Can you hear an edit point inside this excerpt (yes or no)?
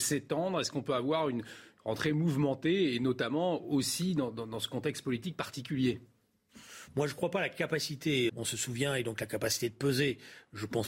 yes